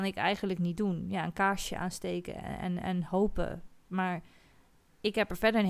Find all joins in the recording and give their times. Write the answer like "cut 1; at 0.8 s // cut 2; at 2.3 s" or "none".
none

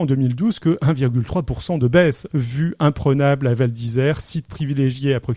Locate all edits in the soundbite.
cut 1; at 2.3 s

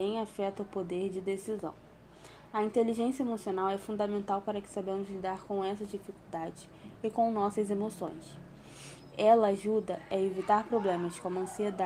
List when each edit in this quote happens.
none

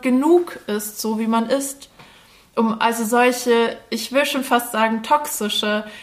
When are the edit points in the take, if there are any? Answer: none

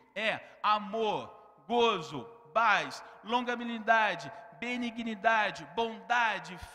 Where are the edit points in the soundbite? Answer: none

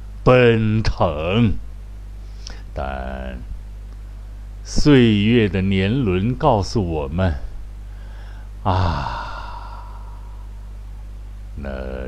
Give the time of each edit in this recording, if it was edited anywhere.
cut 1; at 2.7 s

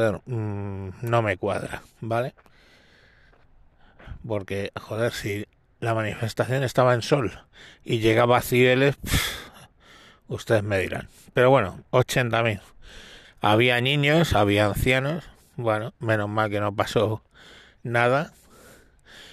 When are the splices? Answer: cut 1; at 9.0 s // cut 2; at 13.2 s

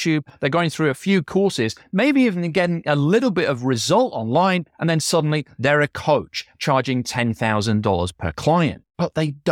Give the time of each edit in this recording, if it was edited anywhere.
none

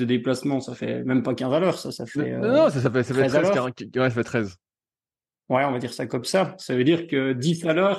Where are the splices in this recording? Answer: none

